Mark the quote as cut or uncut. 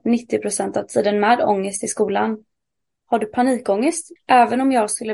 cut